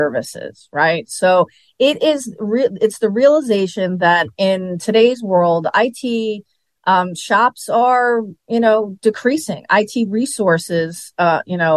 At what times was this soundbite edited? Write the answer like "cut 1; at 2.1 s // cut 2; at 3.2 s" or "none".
none